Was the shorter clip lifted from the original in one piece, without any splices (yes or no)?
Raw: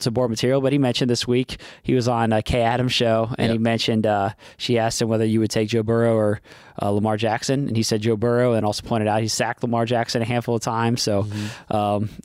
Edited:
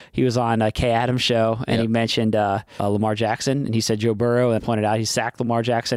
no